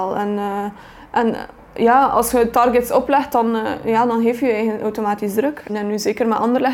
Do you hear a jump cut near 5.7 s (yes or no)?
yes